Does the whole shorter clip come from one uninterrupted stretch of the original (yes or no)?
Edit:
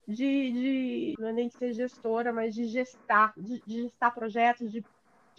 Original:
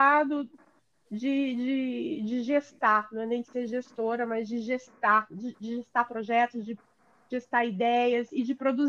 no